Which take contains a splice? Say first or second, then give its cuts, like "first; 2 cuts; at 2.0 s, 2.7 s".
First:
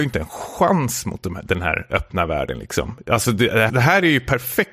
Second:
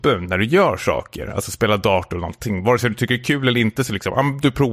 first; 1 cut; at 3.7 s